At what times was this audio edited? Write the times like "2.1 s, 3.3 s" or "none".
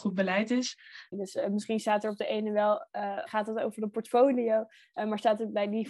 1.1 s, 3.3 s